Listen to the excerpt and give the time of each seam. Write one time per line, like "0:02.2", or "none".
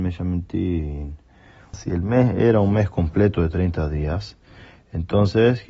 0:01.7

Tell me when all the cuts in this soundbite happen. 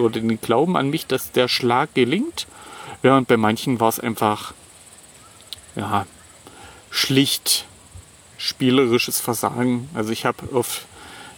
none

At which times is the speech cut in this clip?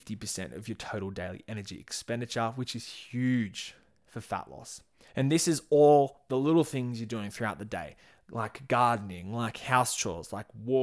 0:05.1

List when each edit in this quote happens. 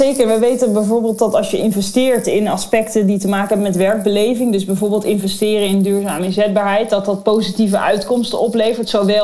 none

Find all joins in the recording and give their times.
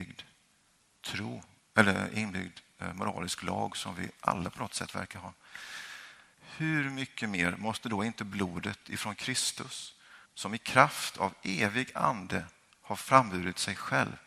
0:06.3
0:10.3

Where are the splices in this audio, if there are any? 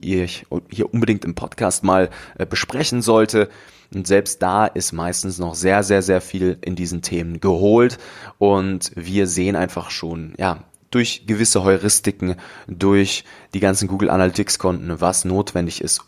0:03.8

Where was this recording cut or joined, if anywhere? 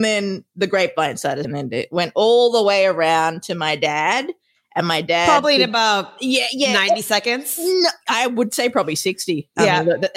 0:01.4

